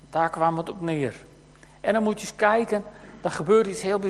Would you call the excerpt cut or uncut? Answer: uncut